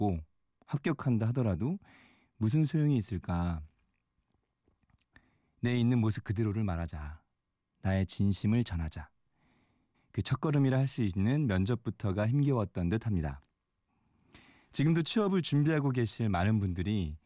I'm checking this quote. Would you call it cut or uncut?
cut